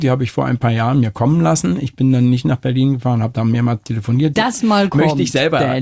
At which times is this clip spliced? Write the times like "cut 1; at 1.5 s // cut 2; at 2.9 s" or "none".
cut 1; at 4.3 s